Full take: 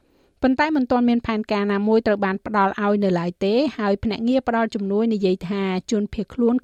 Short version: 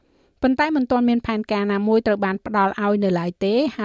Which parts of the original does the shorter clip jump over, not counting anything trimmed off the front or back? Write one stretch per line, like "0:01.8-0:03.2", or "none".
none